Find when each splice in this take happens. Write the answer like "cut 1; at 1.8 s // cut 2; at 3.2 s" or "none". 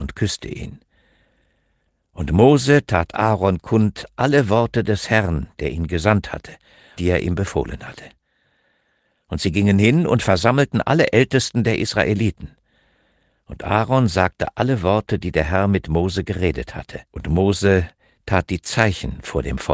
cut 1; at 7.0 s // cut 2; at 17.0 s